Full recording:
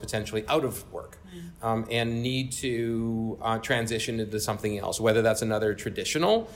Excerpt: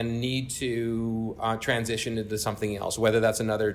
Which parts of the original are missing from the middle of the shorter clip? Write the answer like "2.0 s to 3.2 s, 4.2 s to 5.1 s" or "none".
none